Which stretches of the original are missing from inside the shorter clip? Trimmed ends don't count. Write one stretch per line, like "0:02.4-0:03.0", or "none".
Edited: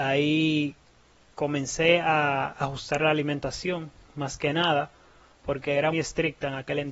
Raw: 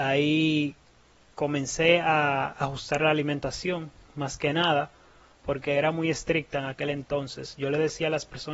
0:05.9-0:06.0